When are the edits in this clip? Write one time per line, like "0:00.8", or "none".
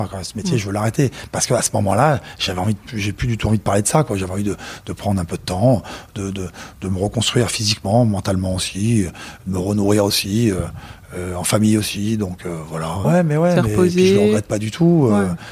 0:13.0